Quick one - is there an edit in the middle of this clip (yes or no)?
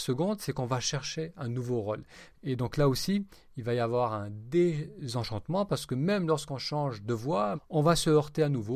yes